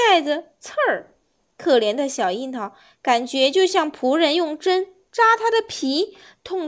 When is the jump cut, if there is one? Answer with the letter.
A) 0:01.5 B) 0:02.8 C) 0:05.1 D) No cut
D